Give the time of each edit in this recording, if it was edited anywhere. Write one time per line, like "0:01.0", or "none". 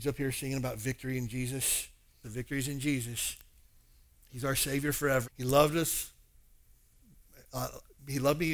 0:02.2
0:05.2